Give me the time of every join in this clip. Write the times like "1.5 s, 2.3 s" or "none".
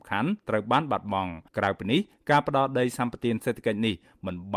1.5 s